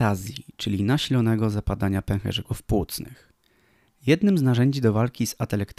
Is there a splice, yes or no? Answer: no